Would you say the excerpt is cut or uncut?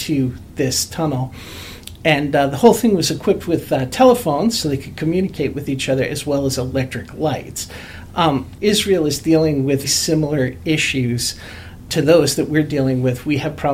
cut